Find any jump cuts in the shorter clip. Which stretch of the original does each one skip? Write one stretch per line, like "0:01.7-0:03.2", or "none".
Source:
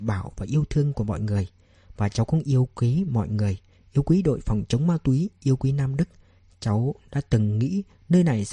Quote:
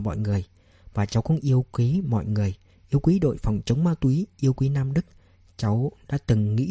none